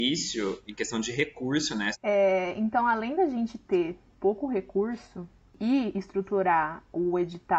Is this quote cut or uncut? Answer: cut